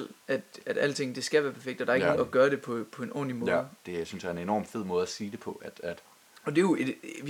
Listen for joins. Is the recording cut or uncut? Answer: cut